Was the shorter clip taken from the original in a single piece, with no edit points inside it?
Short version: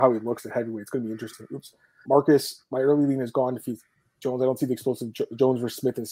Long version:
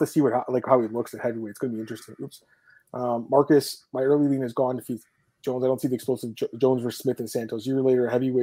no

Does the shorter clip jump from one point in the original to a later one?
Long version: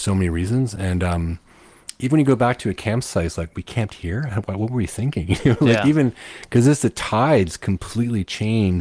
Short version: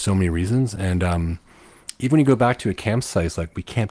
no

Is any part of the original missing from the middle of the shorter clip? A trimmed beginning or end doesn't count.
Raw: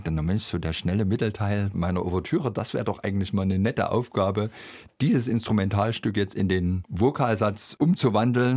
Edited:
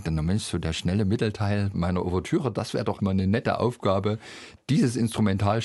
yes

